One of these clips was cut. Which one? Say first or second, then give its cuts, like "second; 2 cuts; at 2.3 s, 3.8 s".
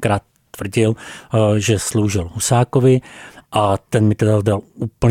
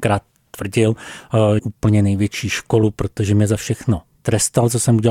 second; 1 cut; at 1.6 s